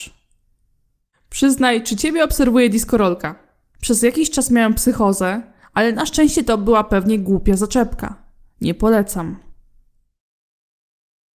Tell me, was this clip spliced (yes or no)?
yes